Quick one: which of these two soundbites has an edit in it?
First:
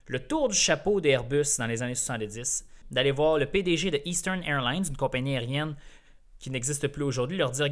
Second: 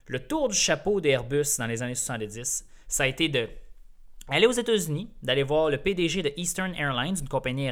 first; 1 cut; at 2.8 s

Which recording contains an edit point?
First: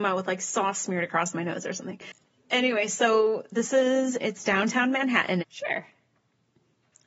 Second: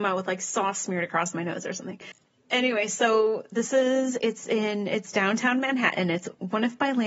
first; 2 cuts; at 4.2 s, 5.4 s

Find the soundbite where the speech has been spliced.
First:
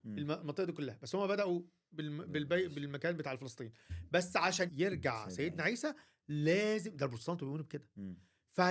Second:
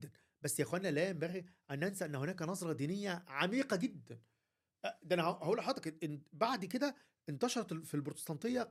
first; 1 cut; at 4.7 s

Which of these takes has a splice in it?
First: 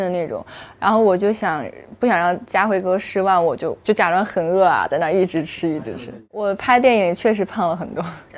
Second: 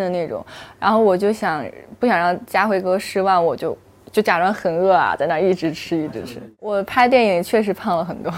first; 1 cut; at 3.8 s

